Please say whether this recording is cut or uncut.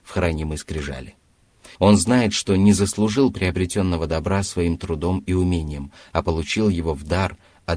cut